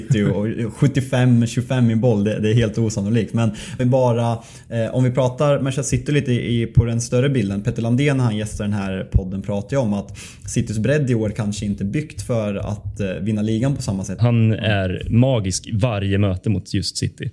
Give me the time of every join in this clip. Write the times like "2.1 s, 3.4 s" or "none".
3.8 s, 14.2 s

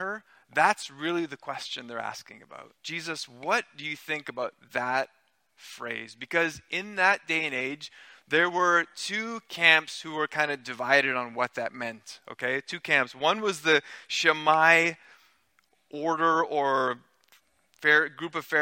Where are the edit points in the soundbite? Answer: 2.8 s

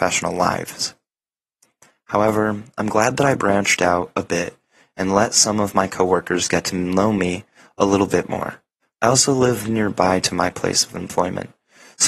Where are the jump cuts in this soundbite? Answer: 8.8 s

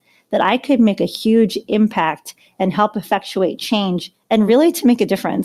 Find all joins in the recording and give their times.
none

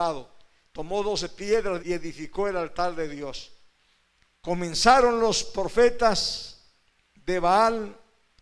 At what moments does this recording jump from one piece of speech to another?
1.8 s, 4.4 s

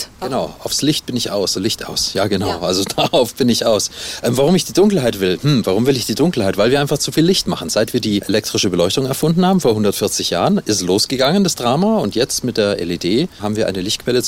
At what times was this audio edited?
1.5 s

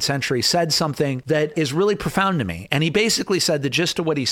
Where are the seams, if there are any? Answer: none

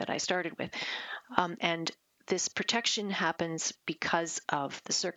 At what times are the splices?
1.6 s

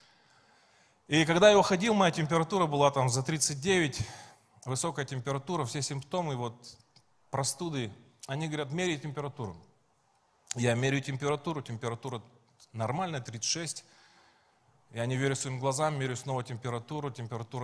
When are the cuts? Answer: none

